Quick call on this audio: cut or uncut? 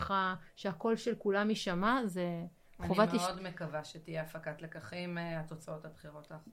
uncut